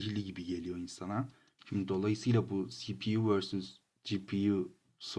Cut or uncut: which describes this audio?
cut